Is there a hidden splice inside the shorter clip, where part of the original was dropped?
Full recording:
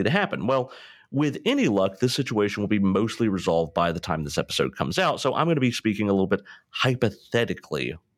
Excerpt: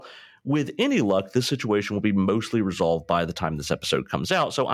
no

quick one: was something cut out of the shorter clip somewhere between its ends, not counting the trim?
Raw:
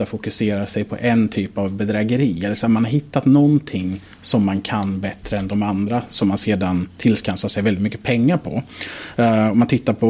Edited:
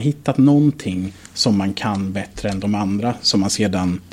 no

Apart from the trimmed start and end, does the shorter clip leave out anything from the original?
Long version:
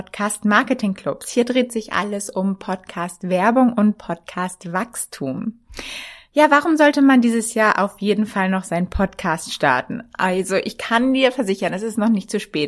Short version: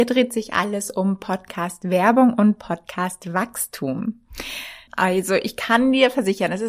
yes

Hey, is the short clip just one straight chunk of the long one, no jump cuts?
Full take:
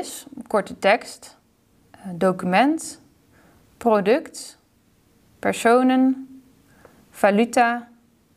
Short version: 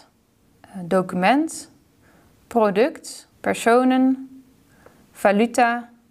no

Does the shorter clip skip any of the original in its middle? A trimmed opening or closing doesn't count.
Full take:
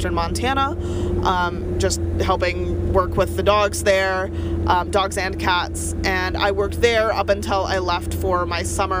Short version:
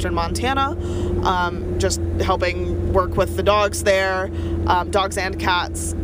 no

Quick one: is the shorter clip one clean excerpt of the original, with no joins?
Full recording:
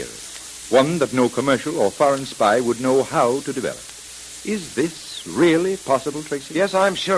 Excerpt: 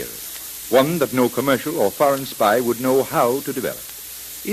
yes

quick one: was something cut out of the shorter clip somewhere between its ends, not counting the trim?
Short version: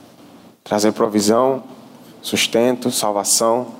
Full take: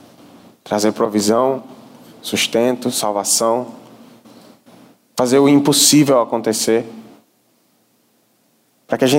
no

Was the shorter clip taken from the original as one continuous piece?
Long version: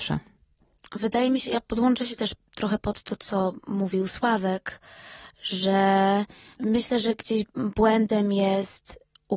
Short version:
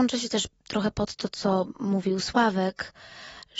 yes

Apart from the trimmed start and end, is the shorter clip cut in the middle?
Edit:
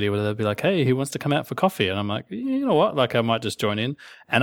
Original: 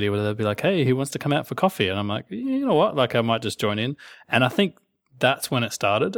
no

